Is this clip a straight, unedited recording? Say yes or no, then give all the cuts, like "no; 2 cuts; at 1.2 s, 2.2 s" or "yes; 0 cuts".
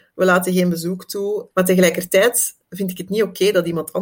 no; 2 cuts; at 1.5 s, 2.6 s